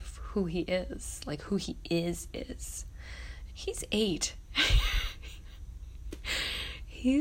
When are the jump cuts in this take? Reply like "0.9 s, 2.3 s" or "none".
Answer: 3.5 s

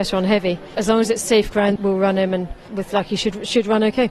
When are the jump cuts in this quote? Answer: 1.8 s

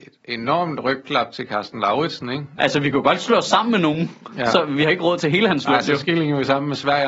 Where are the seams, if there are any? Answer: 2.6 s

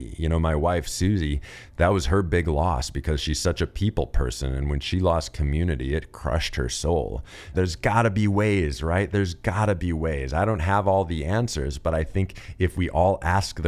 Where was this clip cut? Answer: 7.5 s

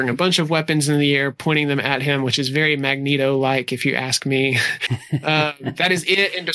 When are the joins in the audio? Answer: 4.9 s

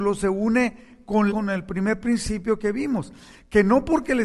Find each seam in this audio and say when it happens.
1.3 s

